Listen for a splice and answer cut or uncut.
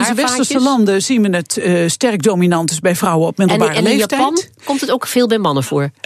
uncut